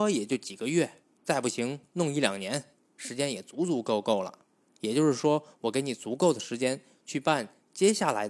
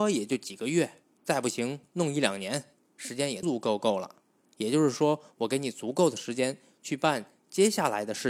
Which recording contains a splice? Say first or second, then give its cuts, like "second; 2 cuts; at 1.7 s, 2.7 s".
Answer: second; 1 cut; at 3.4 s